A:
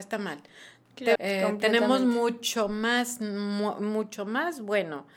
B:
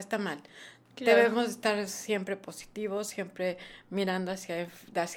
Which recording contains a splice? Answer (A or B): A